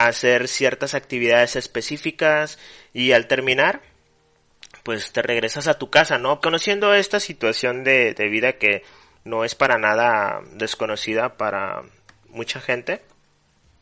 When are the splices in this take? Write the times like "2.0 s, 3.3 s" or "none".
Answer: 6.4 s